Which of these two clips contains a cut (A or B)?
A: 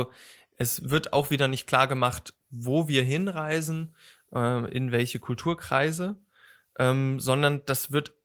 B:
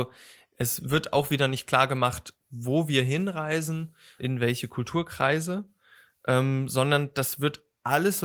B